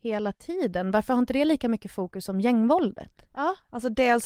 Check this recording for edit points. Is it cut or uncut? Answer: cut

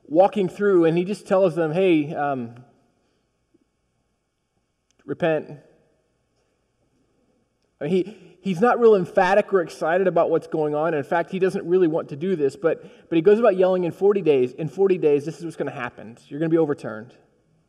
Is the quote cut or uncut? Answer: uncut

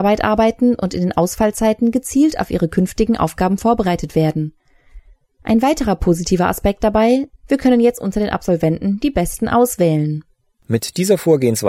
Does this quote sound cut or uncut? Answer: cut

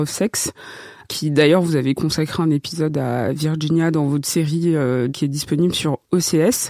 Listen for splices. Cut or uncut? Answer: cut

